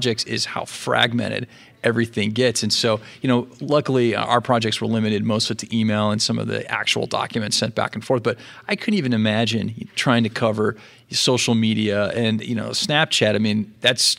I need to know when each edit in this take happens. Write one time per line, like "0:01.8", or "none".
none